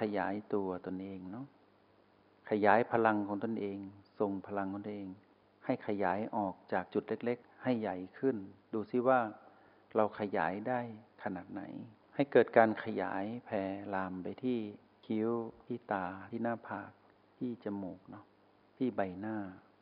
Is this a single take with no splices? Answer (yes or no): no